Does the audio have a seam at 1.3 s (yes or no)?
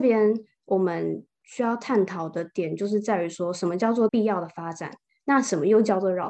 no